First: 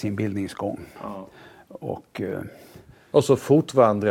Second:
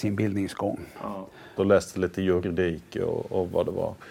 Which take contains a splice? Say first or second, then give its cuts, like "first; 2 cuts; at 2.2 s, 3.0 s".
second; 1 cut; at 1.6 s